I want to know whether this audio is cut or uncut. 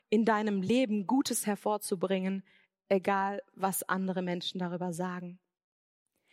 uncut